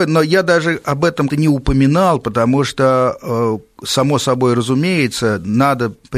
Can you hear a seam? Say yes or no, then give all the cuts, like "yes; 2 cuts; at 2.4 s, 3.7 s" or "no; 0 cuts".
yes; 1 cut; at 1.3 s